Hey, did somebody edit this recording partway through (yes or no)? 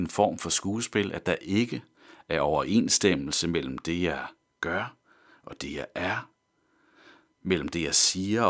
no